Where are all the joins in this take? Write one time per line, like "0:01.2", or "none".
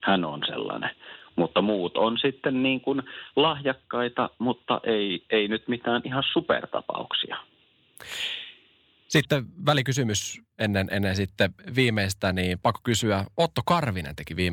none